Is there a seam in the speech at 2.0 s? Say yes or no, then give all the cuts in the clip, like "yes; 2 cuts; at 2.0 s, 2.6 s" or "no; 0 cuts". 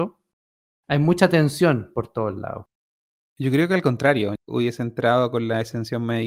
no; 2 cuts; at 3.2 s, 4.4 s